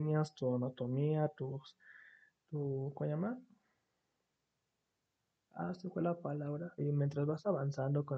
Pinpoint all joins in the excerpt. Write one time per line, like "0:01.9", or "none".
0:06.8